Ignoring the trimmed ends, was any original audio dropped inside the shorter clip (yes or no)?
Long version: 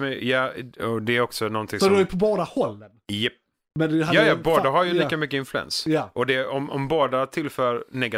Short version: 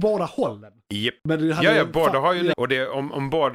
yes